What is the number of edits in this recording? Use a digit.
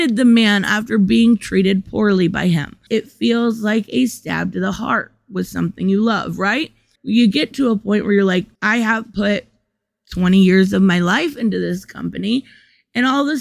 3